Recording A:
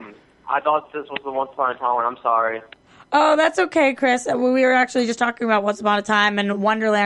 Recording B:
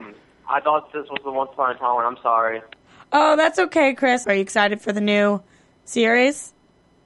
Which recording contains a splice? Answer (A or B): B